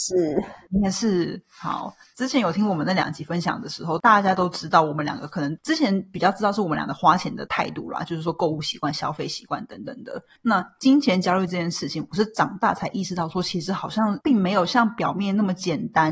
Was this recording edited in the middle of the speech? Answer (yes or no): no